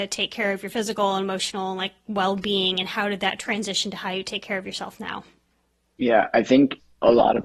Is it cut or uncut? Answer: uncut